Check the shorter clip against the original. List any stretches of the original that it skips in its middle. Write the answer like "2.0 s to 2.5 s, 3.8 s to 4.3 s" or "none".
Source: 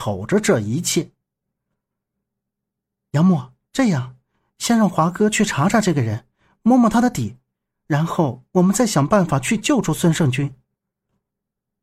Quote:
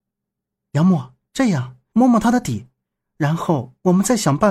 4.3 s to 6.6 s